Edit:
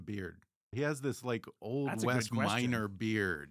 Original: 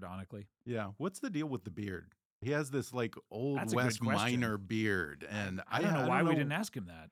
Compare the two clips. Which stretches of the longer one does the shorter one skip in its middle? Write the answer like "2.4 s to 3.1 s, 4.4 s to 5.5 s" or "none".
none